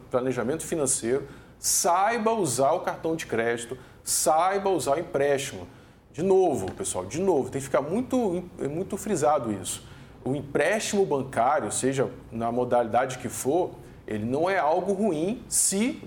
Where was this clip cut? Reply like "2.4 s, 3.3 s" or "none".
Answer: none